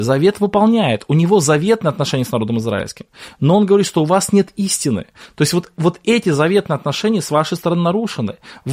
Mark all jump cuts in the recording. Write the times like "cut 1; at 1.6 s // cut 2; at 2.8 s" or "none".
none